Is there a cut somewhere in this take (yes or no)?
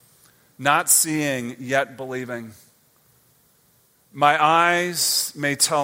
no